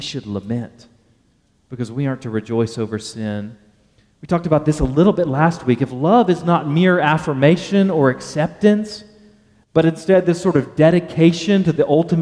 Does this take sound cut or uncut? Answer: uncut